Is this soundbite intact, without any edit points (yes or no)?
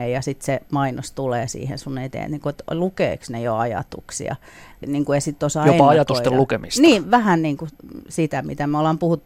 no